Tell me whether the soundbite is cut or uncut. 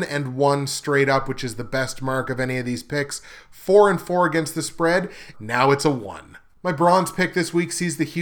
cut